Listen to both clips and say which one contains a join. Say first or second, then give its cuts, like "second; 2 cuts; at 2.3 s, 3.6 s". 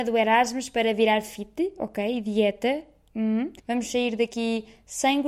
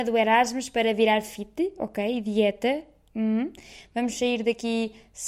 first; 1 cut; at 3.6 s